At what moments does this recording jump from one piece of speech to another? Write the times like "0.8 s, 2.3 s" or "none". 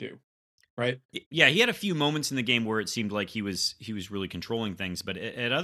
none

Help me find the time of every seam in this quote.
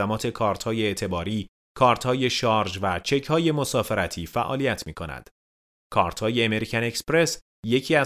none

